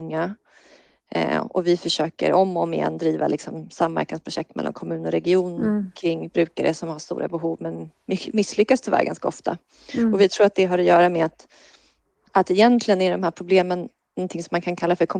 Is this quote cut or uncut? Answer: uncut